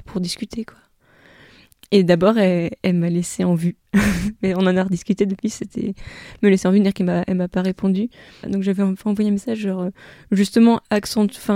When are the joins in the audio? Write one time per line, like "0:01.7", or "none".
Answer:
0:08.4